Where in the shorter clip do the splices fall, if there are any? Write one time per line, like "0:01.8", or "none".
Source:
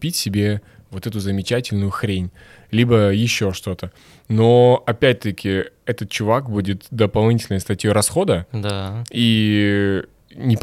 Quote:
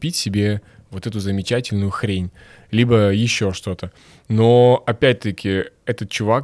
none